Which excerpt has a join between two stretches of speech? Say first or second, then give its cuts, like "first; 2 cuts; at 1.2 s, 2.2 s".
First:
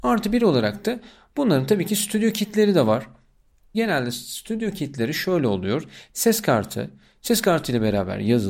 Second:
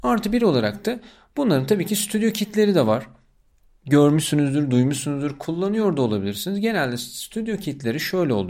first; 1 cut; at 3.7 s